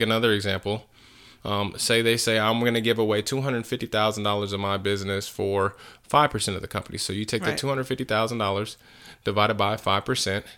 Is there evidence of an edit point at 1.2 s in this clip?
no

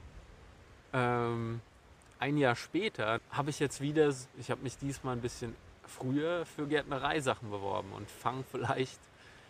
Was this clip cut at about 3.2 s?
yes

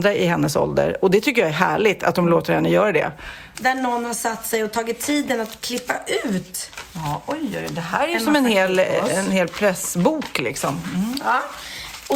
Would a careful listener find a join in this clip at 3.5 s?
yes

